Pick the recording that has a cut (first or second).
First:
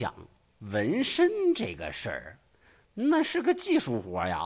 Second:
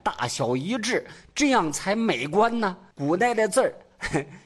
second